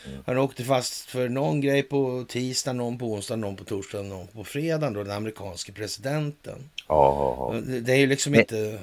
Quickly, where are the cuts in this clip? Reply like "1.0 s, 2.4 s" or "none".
none